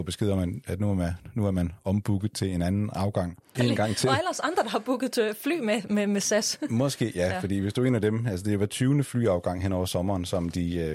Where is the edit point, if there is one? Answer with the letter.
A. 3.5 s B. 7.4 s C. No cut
A